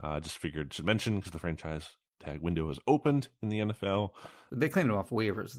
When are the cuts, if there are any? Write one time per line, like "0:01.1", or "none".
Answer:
0:04.5